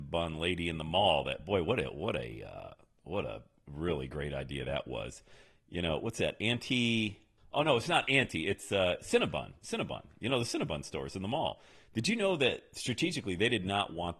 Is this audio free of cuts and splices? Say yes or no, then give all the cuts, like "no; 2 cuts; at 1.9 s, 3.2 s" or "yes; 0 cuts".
yes; 0 cuts